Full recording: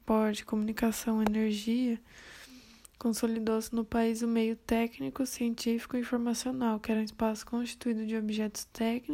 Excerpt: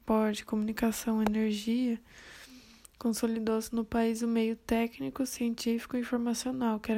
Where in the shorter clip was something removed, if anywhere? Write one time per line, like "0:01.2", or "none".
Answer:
none